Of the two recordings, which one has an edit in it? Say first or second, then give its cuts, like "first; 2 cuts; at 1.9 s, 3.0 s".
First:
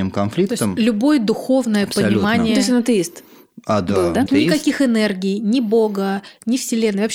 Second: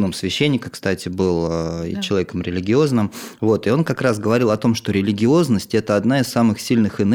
first; 1 cut; at 4.3 s